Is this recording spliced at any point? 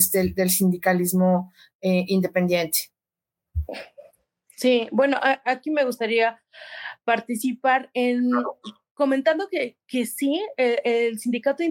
no; 0 cuts

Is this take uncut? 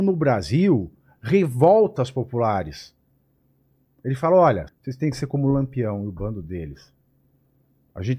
no; 1 cut; at 4.7 s

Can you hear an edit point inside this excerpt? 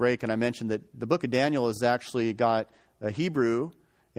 no; 0 cuts

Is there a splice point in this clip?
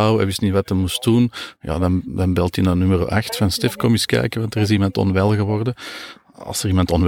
no; 0 cuts

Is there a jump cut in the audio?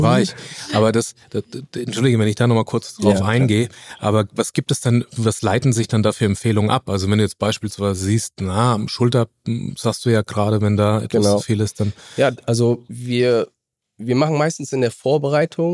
no; 0 cuts

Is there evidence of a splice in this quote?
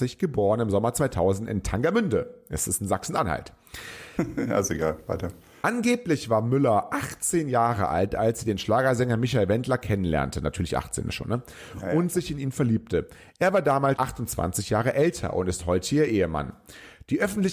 yes; 2 cuts; at 4.2 s, 14.0 s

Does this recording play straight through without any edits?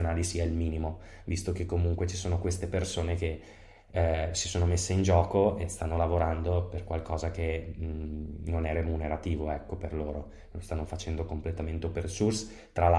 yes; 0 cuts

